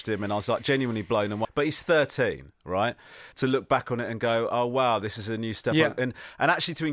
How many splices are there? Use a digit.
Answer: 2